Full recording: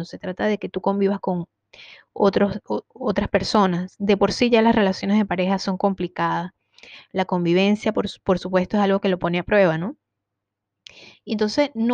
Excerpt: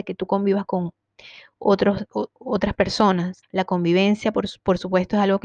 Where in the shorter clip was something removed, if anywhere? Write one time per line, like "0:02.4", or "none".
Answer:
0:03.4